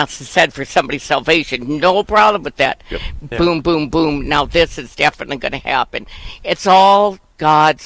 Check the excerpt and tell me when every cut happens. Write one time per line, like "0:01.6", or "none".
0:03.3